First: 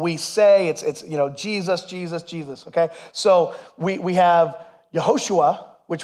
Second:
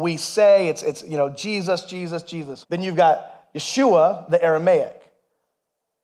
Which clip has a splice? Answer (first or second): second